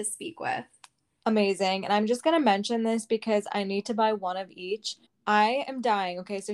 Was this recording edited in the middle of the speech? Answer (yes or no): yes